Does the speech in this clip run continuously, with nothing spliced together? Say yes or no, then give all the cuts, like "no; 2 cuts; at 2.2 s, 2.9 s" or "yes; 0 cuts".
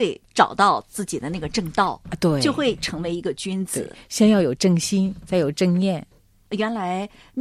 yes; 0 cuts